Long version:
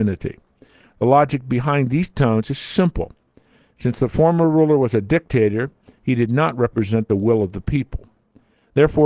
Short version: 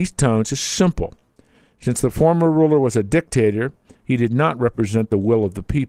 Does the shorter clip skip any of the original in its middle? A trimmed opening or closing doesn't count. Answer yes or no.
no